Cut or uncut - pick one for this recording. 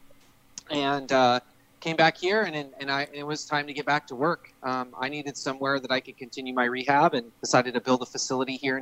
cut